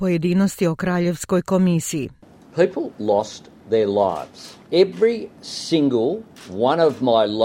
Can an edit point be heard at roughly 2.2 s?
no; 0 cuts

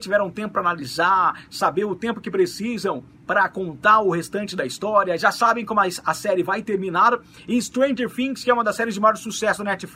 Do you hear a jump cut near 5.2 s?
no; 0 cuts

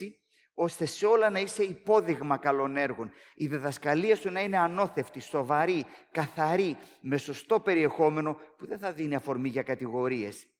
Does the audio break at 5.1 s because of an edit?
no; 0 cuts

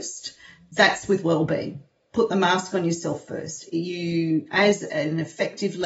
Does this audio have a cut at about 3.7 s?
no; 0 cuts

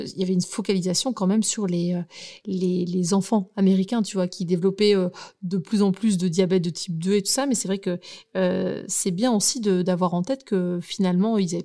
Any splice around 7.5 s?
no; 0 cuts

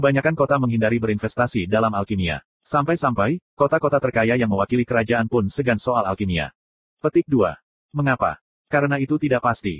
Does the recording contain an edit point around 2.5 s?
no; 0 cuts

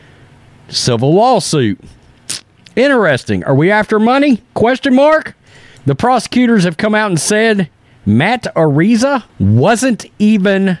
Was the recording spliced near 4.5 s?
no; 2 cuts; at 5.8 s, 9.3 s

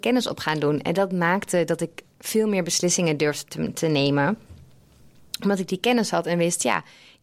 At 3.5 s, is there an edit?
no; 0 cuts

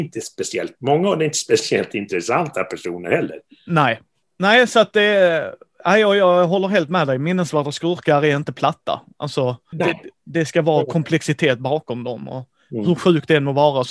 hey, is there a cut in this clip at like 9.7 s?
yes; 1 cut; at 9.7 s

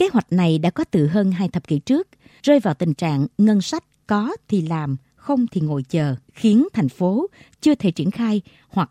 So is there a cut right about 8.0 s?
no; 2 cuts; at 2.3 s, 6.2 s

